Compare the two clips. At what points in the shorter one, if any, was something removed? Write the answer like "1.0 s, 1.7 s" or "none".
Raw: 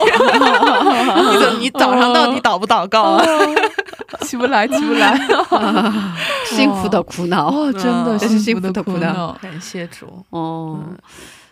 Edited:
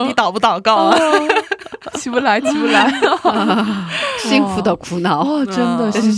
none